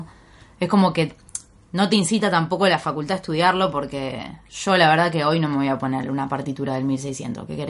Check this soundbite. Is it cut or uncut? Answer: uncut